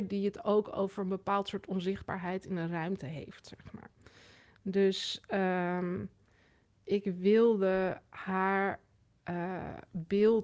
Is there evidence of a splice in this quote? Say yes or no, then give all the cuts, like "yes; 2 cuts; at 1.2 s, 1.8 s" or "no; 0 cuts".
no; 0 cuts